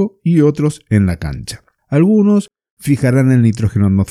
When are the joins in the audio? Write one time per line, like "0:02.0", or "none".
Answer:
0:01.8